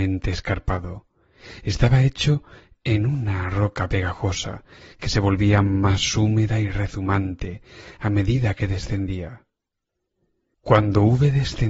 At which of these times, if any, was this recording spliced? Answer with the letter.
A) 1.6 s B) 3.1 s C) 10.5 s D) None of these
C